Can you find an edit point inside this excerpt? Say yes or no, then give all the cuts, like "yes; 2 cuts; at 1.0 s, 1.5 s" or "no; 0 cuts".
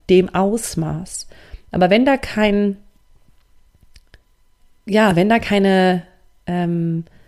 no; 0 cuts